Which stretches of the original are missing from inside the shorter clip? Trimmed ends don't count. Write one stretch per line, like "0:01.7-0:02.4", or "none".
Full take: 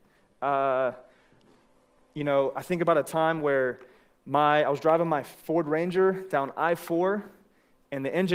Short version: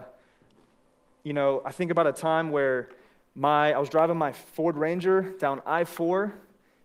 none